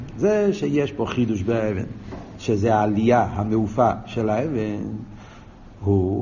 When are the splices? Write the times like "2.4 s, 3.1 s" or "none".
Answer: none